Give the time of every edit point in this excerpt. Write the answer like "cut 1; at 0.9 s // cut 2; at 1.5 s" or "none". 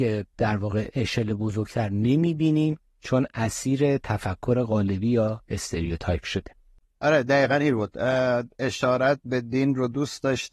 none